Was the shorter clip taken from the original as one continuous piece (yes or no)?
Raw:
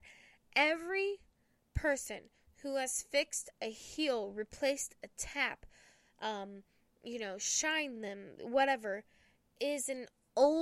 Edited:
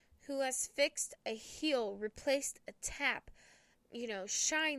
no